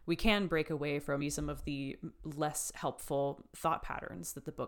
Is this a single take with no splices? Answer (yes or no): no